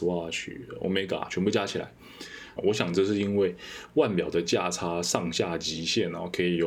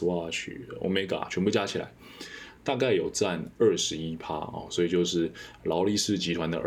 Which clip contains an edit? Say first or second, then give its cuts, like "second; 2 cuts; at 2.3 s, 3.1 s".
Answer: first; 1 cut; at 2.6 s